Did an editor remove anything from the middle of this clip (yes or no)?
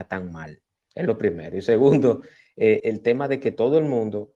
yes